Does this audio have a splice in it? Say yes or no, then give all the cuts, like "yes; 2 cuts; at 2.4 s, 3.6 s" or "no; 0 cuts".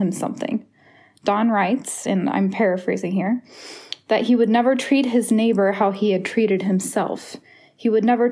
no; 0 cuts